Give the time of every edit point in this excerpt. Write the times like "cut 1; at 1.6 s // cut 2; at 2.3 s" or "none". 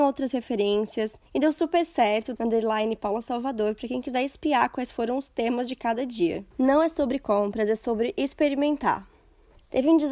cut 1; at 2.4 s // cut 2; at 6.5 s